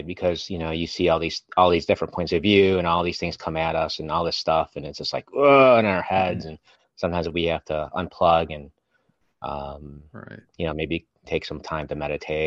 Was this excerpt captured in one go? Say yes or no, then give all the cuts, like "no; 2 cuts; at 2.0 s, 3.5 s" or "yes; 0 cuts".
yes; 0 cuts